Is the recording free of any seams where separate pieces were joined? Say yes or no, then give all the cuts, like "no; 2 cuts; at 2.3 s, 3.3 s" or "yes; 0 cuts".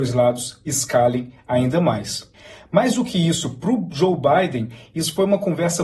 yes; 0 cuts